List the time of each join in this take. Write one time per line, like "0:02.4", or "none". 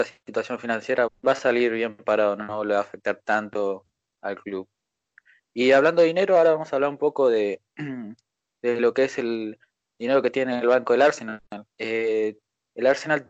0:01.1